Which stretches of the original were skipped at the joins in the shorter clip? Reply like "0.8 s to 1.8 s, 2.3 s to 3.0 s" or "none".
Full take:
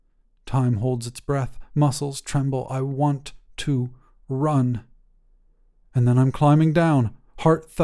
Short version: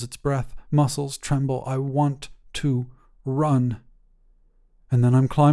none